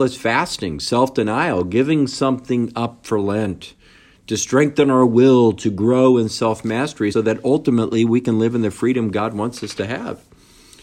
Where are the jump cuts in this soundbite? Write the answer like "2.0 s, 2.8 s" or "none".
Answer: 7.1 s